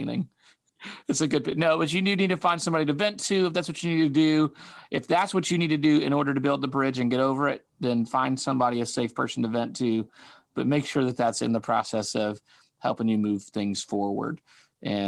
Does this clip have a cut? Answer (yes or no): no